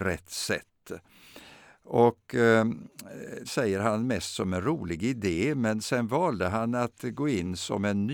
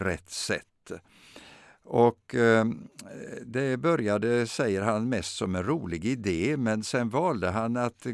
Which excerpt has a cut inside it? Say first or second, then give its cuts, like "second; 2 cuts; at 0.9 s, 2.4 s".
first; 1 cut; at 3.5 s